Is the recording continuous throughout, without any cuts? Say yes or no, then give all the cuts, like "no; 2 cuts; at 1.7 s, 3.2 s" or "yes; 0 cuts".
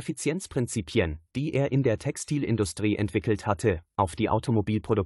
yes; 0 cuts